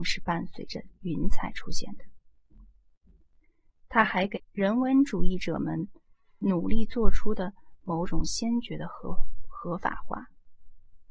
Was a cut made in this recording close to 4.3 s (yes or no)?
yes